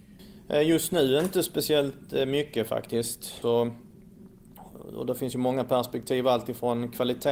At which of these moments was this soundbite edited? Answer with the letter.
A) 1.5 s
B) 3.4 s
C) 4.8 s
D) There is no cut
B